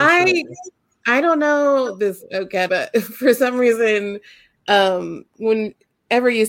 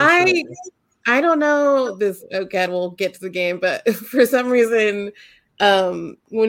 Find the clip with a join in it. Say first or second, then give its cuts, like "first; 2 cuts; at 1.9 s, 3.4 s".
first; 1 cut; at 2.7 s